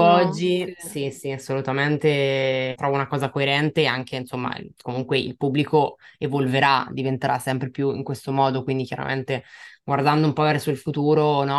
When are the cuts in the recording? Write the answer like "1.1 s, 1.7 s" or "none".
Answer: 2.8 s